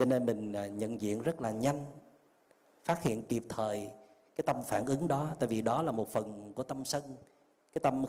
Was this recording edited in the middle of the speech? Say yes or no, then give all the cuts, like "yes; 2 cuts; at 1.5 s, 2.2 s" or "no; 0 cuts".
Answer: no; 0 cuts